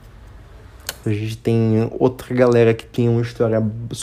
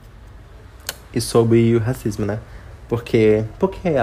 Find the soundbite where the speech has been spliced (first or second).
first